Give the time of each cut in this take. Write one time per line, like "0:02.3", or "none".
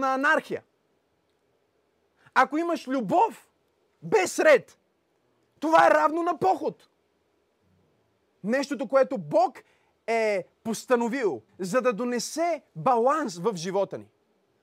0:08.4
0:11.5